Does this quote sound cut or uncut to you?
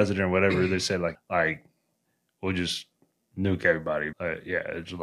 cut